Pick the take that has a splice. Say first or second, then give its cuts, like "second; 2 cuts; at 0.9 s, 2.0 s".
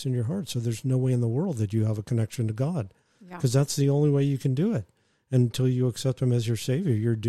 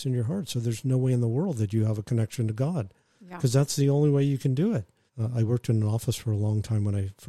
second; 1 cut; at 5.1 s